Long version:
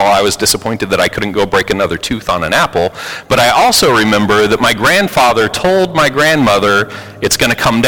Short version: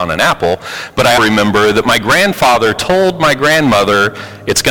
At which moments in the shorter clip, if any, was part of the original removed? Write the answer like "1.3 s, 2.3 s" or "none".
1.2 s